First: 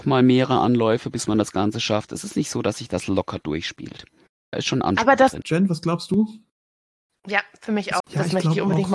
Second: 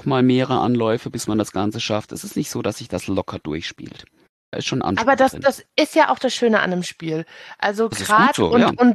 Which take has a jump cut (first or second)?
first